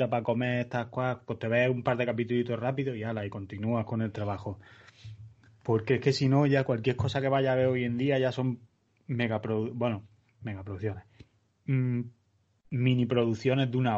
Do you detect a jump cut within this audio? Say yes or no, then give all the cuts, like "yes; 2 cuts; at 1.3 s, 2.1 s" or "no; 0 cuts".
no; 0 cuts